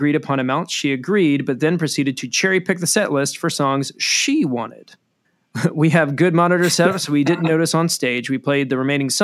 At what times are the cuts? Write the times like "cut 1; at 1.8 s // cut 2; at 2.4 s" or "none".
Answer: cut 1; at 5.2 s